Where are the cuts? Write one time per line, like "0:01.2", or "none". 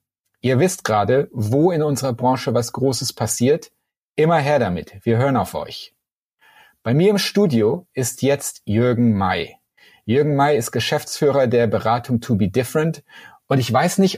none